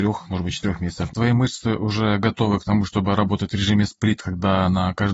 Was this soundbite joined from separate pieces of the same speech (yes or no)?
yes